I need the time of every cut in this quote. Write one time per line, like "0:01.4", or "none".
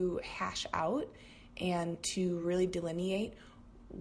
none